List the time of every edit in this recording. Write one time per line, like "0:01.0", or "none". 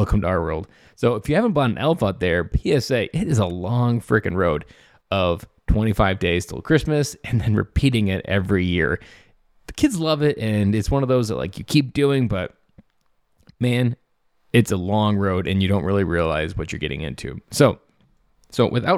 none